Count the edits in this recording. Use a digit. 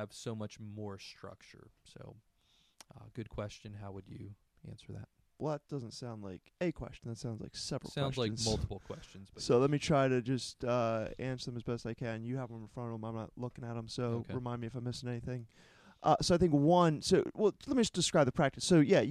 0